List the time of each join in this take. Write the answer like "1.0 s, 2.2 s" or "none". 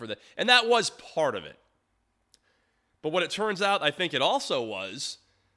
none